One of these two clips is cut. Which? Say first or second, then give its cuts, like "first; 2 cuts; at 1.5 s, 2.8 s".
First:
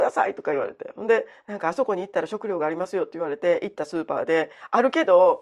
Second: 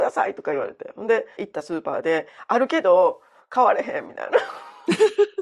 second; 1 cut; at 1.4 s